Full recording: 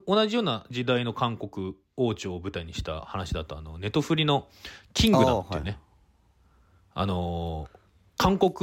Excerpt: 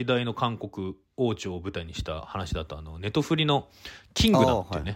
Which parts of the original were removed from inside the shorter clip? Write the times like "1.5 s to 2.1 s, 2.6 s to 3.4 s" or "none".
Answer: none